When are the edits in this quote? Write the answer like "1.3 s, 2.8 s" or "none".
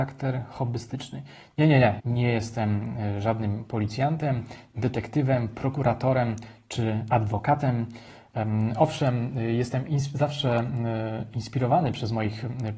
2.0 s

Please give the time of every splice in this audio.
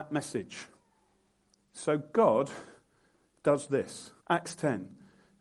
4.2 s

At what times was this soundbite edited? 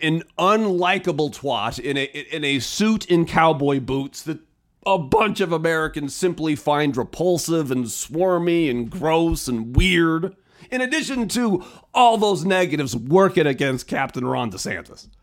none

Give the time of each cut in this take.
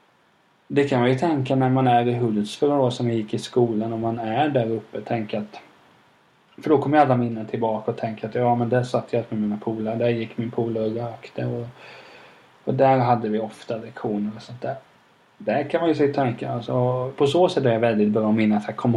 17.1 s

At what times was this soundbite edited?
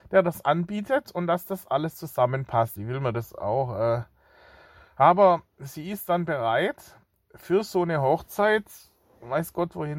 2.8 s

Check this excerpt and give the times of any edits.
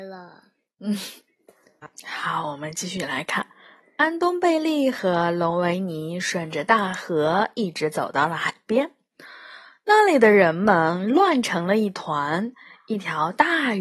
none

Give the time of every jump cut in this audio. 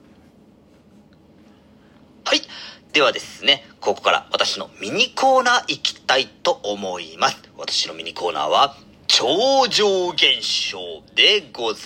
none

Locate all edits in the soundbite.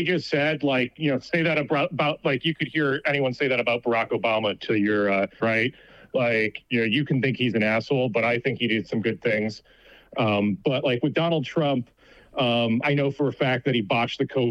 5.4 s, 12.8 s

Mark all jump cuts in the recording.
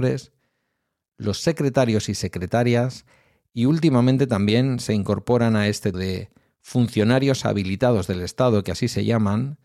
5.9 s

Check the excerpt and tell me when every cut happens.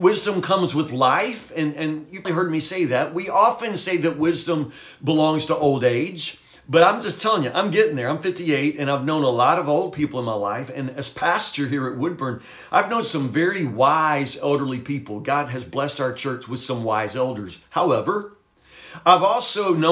2.2 s

